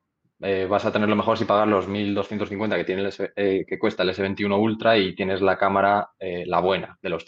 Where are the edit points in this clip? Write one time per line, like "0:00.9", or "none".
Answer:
none